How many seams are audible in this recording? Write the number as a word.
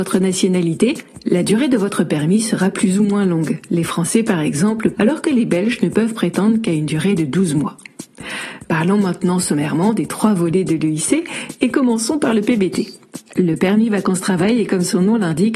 two